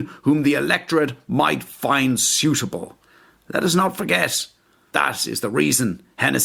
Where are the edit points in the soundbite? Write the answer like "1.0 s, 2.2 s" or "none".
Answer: 4.9 s